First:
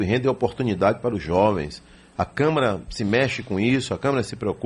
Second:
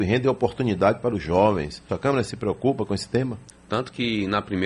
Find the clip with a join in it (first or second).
second